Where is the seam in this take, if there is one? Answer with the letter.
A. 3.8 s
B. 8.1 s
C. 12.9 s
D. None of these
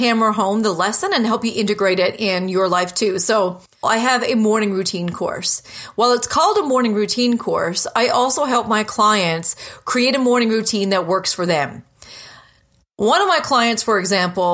A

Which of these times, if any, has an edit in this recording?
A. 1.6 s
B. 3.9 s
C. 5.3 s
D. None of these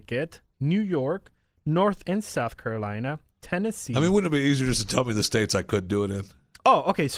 D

